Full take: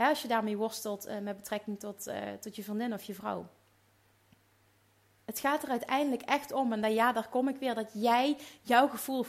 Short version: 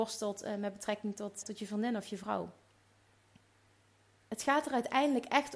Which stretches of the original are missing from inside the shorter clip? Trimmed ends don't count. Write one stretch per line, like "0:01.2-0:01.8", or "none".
0:02.1-0:02.4